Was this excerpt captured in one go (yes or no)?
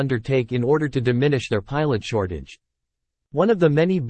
yes